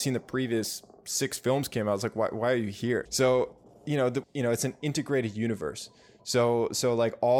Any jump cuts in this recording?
yes; 2 cuts; at 3.1 s, 4.2 s

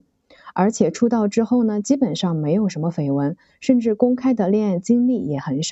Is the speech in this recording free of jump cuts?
yes; 0 cuts

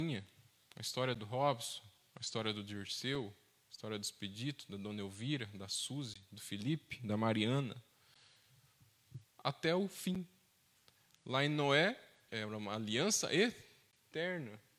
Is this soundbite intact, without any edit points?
no; 1 cut; at 12.3 s

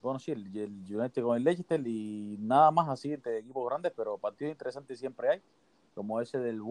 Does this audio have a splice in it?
no; 0 cuts

